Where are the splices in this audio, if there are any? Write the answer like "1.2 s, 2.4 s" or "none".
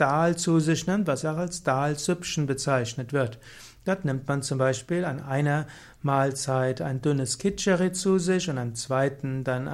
1.2 s